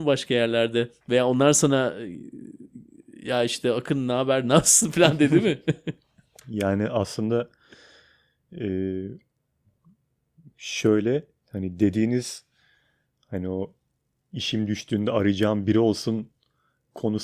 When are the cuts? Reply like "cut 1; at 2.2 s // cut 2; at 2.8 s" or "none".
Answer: none